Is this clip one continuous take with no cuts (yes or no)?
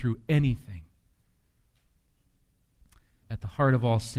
no